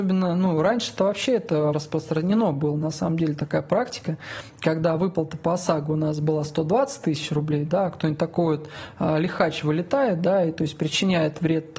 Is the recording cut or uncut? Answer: cut